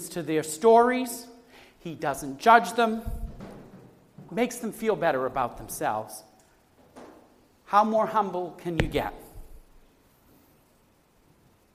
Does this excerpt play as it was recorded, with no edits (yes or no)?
no